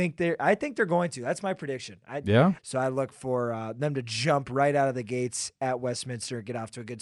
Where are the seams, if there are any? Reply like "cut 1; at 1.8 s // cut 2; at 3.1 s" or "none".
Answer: cut 1; at 2.6 s